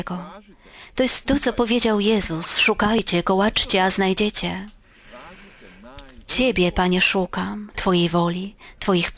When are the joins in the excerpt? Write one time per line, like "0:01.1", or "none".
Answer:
0:06.2
0:07.7